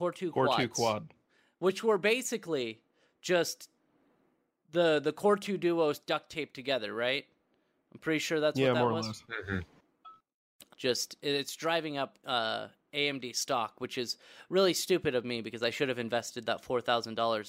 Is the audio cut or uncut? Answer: cut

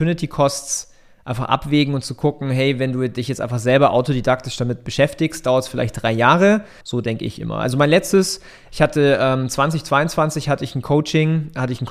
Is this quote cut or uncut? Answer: cut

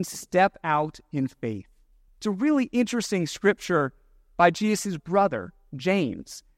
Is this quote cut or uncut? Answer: cut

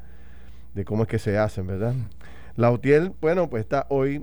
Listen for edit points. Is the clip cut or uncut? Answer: uncut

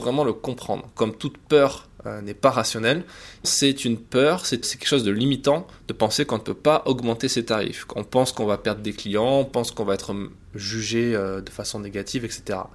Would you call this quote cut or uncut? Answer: cut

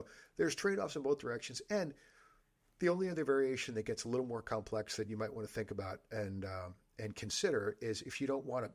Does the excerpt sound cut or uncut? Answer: uncut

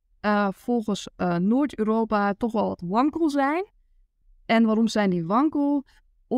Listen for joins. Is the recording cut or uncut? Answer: uncut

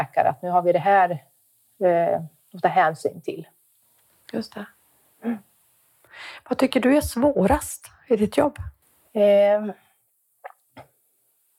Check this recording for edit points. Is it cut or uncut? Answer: uncut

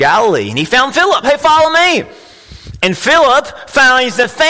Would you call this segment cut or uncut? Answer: cut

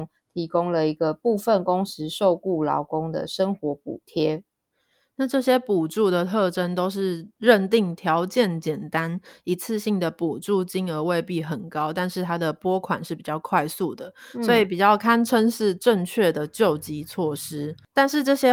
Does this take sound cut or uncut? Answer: uncut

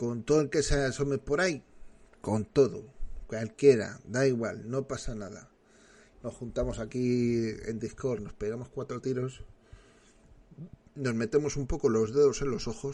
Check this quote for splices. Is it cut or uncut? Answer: cut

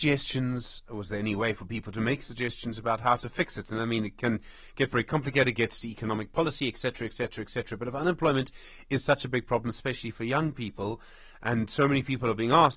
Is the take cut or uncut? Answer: uncut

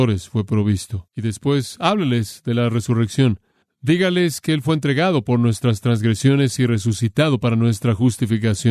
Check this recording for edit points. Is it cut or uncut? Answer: cut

